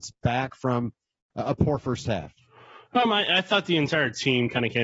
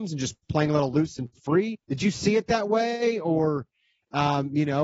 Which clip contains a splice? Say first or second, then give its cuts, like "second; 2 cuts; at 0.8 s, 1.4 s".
second; 1 cut; at 1.8 s